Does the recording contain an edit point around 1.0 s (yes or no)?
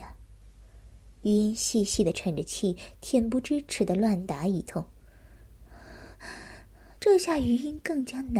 no